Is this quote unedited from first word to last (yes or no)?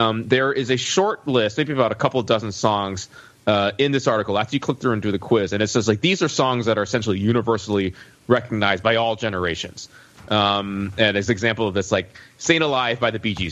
yes